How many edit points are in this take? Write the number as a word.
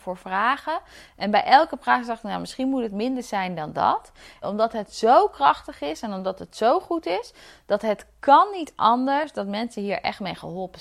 one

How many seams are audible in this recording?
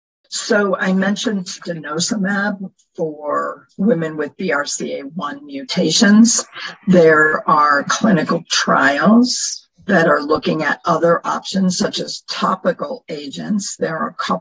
zero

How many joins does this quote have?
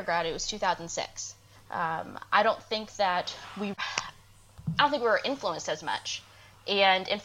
two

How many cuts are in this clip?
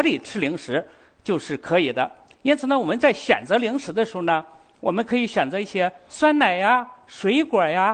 zero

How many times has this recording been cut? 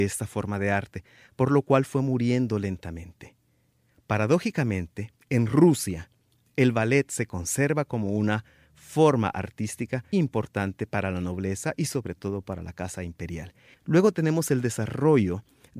two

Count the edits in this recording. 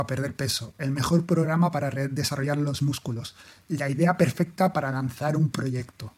zero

